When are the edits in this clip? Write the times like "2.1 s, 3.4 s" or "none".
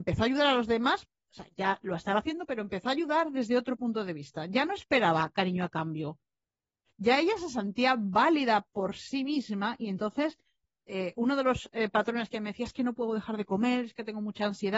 none